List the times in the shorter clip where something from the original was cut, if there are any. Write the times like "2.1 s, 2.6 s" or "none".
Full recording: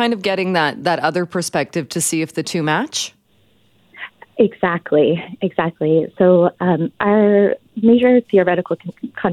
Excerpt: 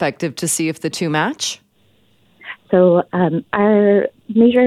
2.7 s